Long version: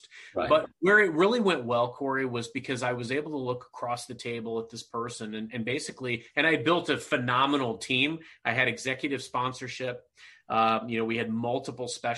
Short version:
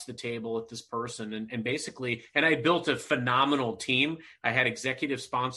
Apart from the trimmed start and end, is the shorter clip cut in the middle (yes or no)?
no